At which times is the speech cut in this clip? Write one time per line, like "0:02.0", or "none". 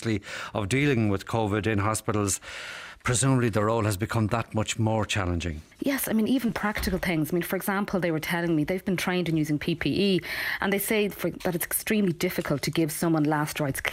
0:05.7